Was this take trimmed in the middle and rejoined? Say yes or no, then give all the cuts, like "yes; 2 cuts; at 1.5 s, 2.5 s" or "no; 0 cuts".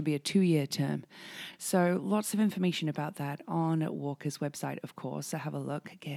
no; 0 cuts